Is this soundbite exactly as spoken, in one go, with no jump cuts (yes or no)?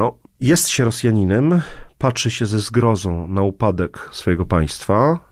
yes